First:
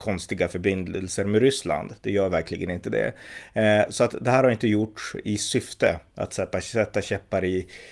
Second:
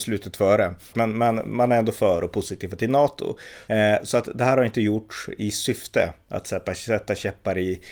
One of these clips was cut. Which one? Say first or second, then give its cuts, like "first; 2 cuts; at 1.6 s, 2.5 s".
second; 2 cuts; at 0.9 s, 3.7 s